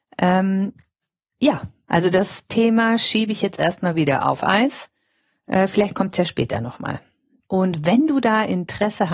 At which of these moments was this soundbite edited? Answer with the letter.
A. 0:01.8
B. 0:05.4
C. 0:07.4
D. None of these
C